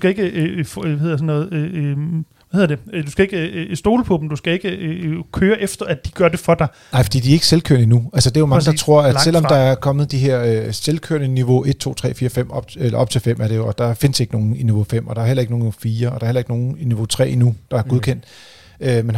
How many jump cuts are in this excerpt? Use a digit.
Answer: 0